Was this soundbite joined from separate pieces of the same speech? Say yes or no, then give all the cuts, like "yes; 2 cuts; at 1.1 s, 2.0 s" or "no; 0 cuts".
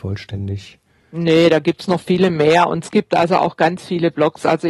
no; 0 cuts